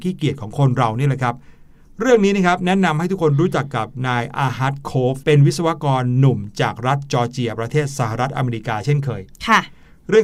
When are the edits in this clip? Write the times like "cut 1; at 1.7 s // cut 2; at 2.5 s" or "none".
cut 1; at 5.2 s